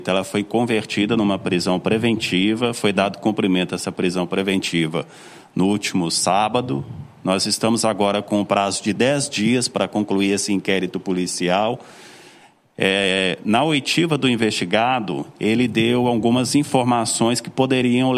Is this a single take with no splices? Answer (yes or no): yes